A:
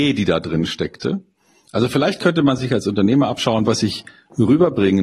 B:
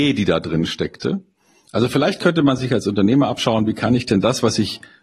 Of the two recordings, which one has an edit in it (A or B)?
A